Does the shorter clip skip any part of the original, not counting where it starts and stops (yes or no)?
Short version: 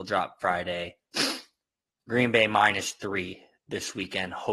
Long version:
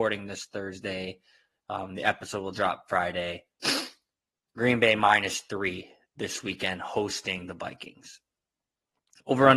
no